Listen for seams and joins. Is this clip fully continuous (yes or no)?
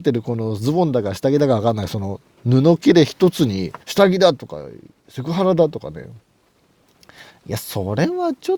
no